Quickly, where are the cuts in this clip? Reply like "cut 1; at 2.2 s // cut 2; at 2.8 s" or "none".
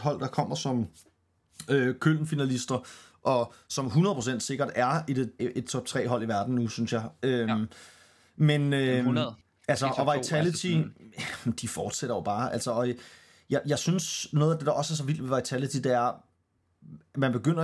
cut 1; at 5.4 s